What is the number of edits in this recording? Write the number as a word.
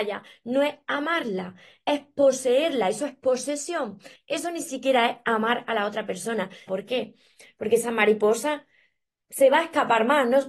two